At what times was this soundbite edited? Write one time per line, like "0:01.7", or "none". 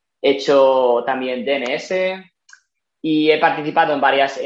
none